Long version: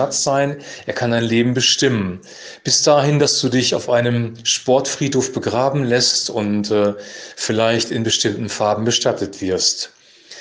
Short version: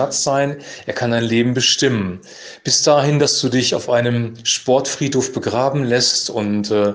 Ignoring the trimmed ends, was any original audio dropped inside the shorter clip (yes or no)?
no